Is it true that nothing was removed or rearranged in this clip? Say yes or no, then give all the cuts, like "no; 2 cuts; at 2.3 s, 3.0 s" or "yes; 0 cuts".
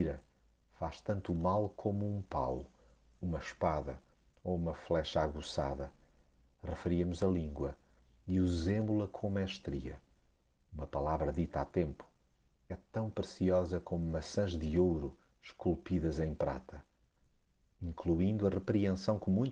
yes; 0 cuts